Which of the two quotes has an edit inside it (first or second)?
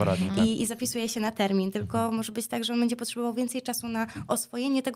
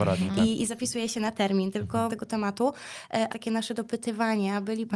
second